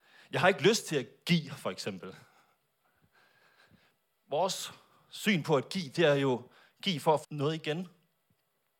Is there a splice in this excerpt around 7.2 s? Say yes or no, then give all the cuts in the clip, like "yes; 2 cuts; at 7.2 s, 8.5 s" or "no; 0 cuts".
yes; 1 cut; at 7.2 s